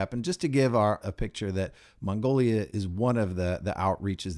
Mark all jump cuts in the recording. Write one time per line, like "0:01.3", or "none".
0:01.0
0:02.7